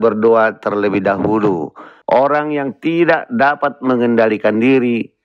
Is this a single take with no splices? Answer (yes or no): no